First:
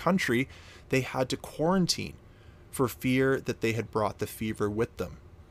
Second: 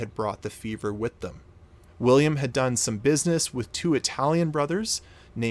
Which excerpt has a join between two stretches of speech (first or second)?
second